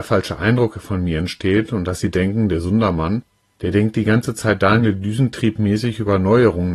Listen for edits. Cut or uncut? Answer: uncut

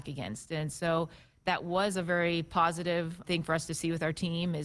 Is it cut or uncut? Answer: cut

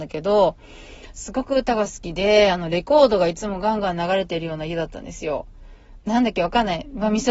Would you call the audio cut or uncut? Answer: cut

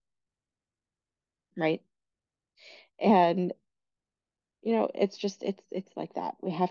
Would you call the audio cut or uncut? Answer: uncut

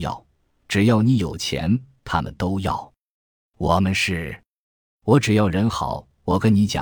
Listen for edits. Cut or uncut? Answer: uncut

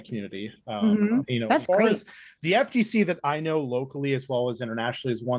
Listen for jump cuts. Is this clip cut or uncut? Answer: cut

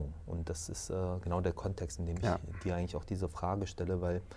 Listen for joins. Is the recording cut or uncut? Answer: uncut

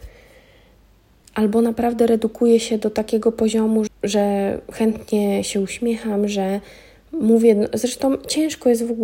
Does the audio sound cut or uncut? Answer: cut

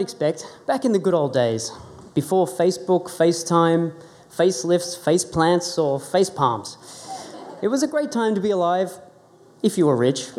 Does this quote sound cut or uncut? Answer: uncut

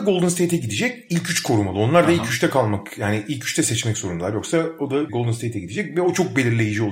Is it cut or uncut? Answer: uncut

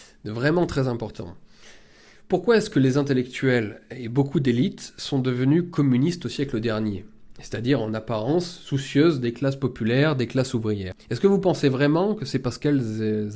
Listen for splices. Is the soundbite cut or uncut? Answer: uncut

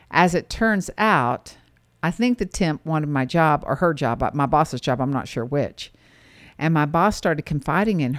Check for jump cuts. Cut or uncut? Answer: uncut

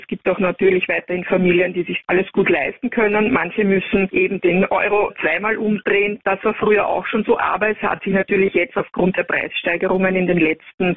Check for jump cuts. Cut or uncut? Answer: uncut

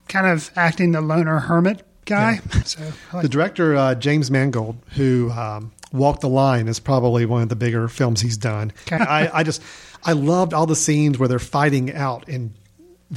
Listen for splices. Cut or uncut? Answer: cut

